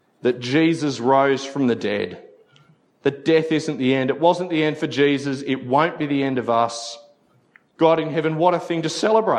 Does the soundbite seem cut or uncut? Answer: uncut